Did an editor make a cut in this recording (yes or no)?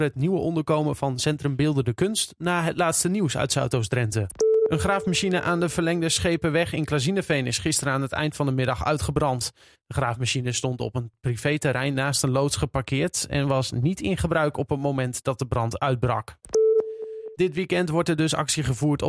yes